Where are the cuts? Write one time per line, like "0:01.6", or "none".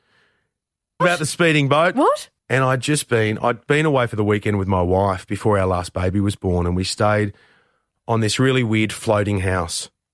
0:01.0
0:02.4